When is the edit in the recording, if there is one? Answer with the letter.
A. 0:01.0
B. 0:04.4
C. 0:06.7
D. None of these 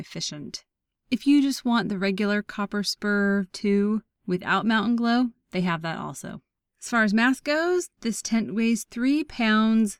D